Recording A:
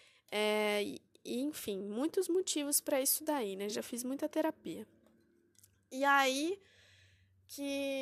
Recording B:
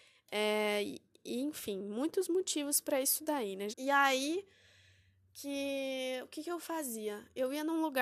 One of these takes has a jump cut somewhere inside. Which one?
B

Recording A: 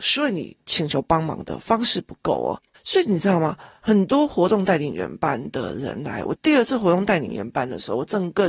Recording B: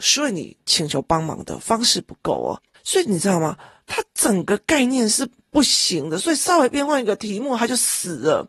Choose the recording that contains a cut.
B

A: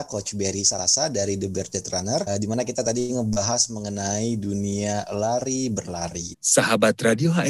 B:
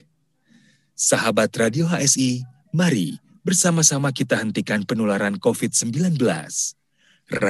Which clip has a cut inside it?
A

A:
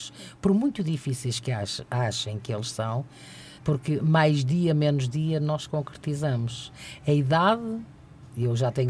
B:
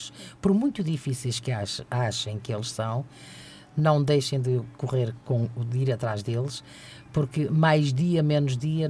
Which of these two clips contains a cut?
A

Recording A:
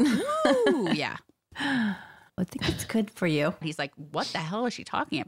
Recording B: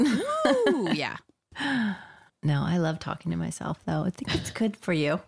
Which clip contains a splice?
A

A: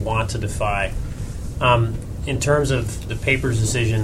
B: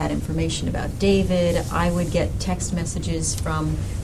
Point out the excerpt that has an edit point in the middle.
A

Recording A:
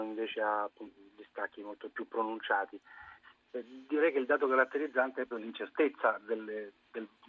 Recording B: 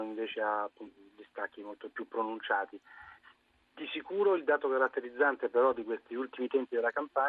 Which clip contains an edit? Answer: A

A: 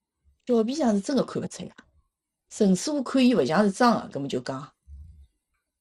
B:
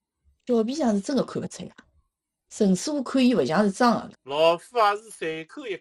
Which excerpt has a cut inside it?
B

